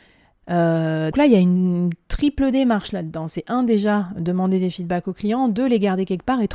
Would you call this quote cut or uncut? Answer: cut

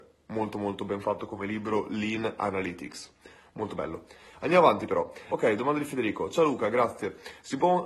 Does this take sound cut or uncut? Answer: uncut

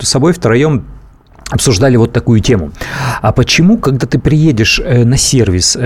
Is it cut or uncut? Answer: uncut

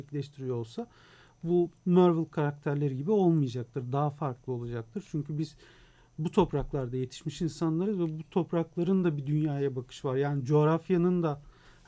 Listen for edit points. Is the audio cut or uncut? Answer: uncut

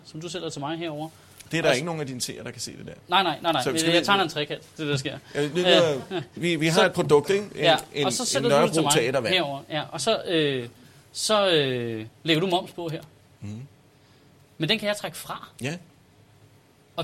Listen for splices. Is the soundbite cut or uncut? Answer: cut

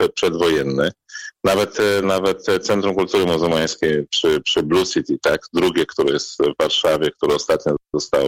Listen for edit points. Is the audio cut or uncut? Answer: cut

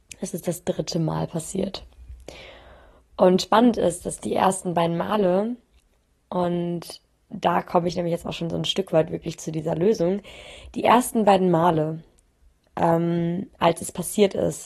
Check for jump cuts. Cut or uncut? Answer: uncut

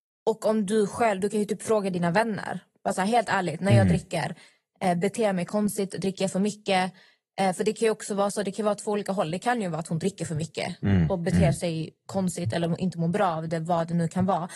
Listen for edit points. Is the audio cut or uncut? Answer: uncut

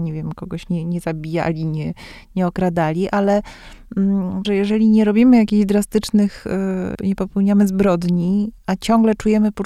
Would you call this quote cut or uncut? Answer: cut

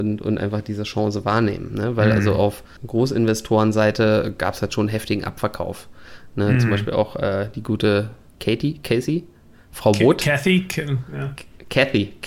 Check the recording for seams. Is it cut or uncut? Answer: uncut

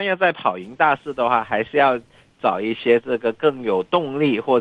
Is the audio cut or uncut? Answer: uncut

